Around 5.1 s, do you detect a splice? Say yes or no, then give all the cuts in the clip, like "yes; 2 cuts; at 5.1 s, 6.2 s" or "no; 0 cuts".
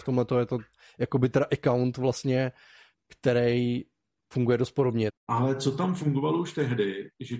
yes; 1 cut; at 5.1 s